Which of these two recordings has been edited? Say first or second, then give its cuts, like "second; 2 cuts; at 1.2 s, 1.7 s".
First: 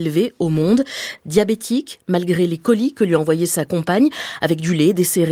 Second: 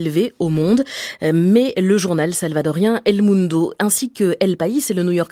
first; 1 cut; at 1.2 s